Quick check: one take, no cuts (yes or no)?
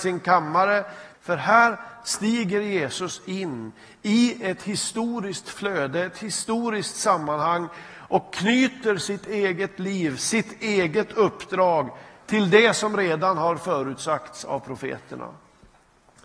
no